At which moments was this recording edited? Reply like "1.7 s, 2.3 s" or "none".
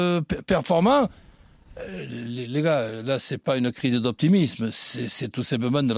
none